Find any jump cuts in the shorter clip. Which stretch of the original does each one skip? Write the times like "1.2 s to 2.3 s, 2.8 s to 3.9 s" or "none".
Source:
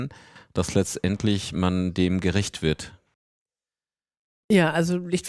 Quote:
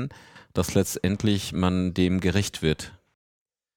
none